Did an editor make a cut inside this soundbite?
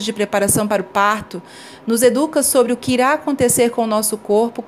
no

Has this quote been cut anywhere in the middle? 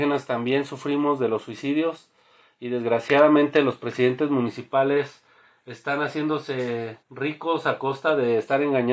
yes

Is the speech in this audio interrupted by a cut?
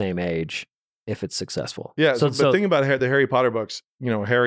no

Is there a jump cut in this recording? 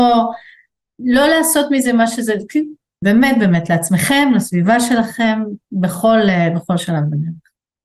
yes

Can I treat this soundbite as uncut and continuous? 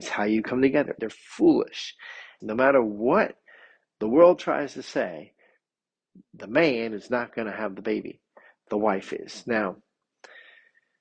no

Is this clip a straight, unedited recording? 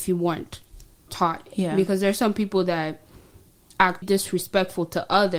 no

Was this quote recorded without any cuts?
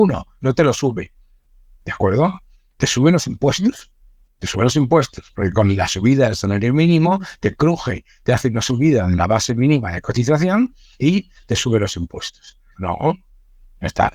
no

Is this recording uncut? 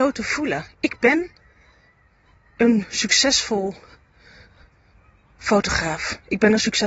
yes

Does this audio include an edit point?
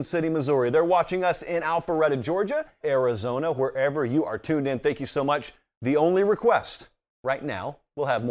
yes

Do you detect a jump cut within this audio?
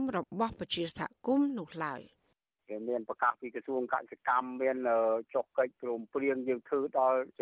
no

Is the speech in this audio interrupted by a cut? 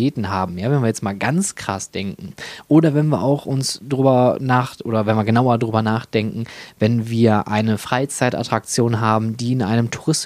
no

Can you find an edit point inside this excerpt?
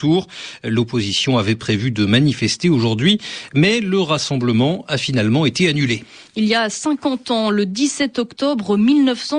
no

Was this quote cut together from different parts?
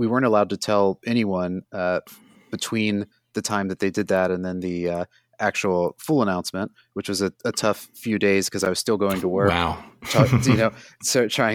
no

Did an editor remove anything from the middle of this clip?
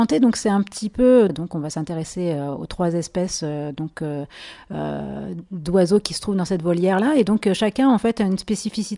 yes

